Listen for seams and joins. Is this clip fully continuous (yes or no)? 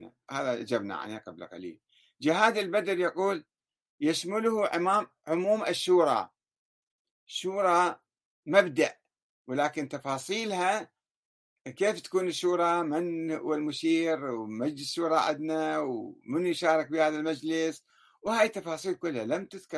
yes